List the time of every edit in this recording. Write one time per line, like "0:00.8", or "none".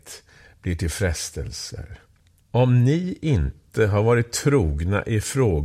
0:02.4